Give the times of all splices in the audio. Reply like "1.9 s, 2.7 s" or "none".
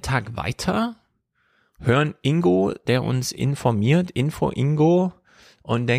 none